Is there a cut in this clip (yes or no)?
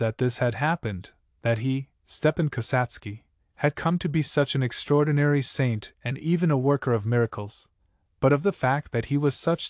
no